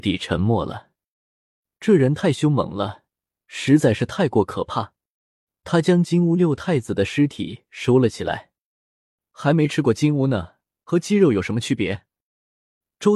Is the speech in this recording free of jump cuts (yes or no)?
no